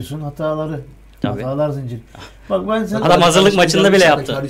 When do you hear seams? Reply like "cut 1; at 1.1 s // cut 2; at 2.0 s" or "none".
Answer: none